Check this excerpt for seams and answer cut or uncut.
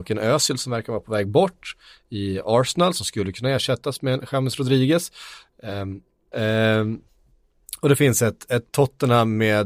cut